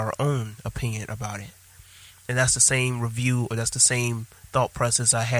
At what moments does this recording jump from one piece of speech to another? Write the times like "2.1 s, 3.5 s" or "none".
none